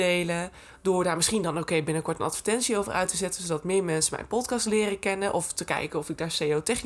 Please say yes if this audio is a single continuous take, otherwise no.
yes